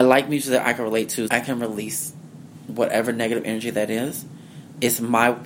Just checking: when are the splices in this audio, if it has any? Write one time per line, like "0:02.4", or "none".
0:01.3